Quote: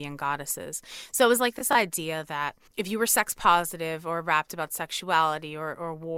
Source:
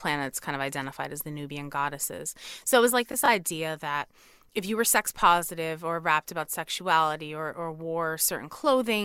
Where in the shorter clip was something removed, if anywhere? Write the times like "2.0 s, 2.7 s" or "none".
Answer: 2.7 s